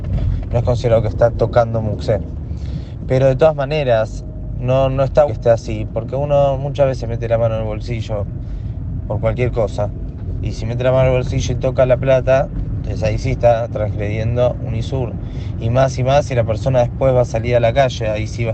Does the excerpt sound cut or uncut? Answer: cut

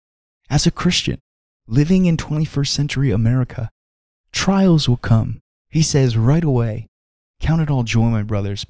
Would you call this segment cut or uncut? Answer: cut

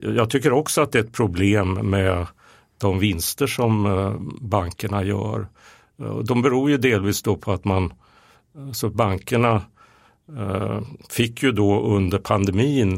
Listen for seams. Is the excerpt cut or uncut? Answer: uncut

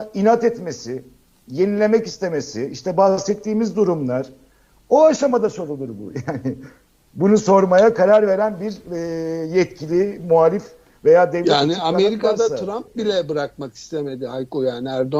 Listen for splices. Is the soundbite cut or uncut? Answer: uncut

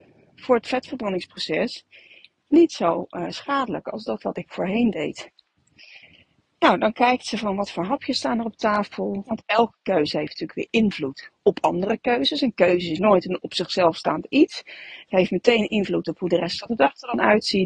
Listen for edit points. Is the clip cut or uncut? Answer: cut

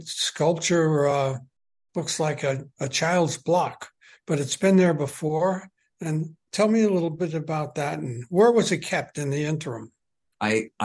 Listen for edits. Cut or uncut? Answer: uncut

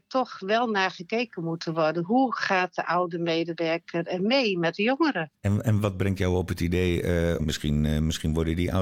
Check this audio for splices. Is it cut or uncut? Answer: cut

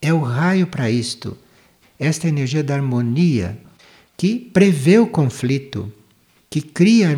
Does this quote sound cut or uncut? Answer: cut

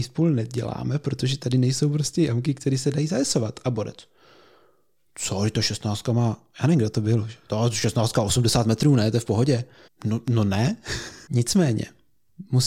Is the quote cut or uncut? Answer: cut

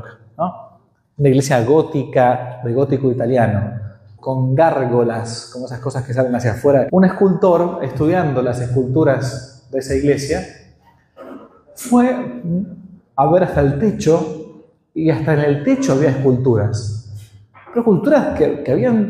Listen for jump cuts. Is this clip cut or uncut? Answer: cut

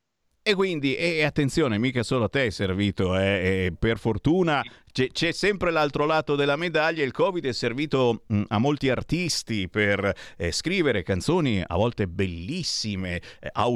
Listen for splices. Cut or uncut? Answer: uncut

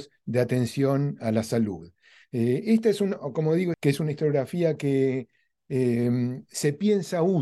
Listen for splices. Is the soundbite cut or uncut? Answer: cut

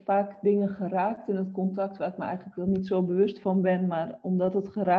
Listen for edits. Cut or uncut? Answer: uncut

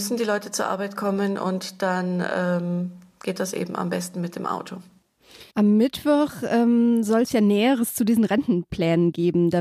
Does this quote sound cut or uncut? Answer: cut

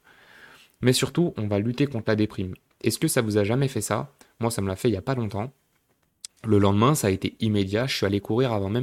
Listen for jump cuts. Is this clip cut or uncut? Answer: cut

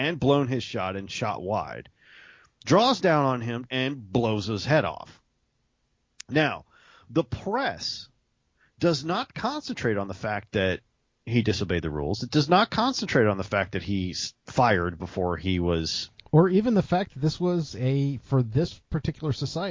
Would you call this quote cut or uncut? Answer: cut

